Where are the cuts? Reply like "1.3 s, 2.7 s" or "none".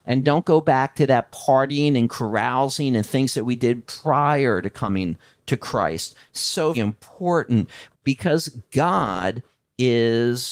6.7 s, 7.9 s